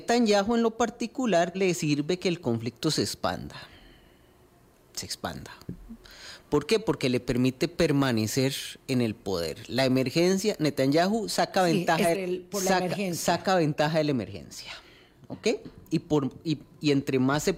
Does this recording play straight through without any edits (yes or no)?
no